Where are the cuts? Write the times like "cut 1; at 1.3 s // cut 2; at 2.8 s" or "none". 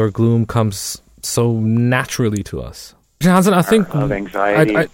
cut 1; at 3.2 s